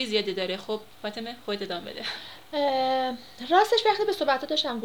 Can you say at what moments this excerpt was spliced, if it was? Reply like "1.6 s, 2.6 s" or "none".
0.9 s